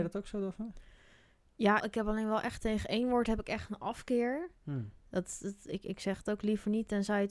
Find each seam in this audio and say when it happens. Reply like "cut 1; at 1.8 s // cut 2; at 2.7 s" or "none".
cut 1; at 1.8 s